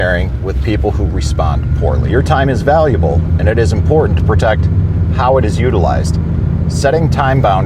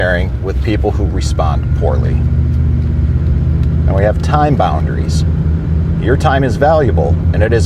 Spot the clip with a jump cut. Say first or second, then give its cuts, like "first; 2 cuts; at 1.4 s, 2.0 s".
first; 1 cut; at 2.1 s